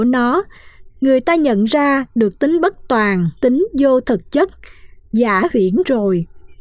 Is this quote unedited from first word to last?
no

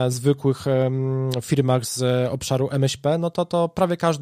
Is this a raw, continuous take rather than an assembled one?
yes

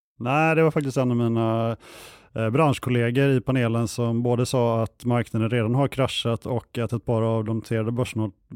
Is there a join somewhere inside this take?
no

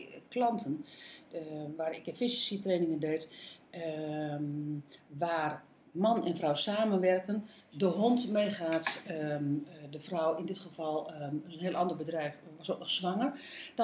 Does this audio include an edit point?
no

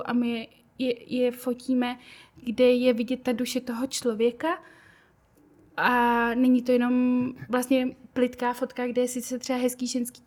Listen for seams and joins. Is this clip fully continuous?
no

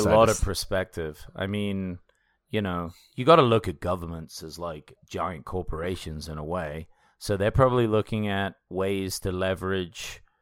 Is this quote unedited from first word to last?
yes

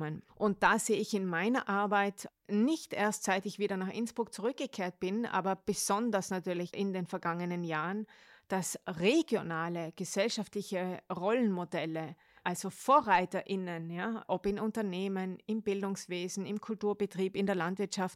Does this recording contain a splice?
no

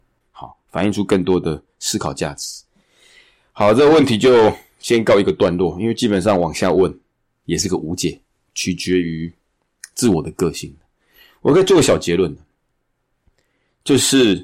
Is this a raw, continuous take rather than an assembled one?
yes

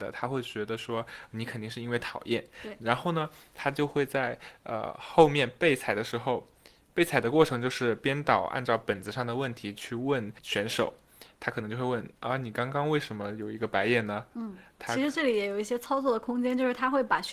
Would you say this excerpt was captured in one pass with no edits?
yes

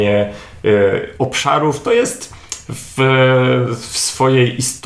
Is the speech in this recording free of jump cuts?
yes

